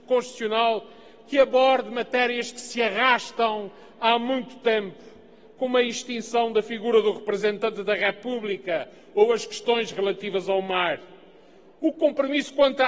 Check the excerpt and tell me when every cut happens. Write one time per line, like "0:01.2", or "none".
none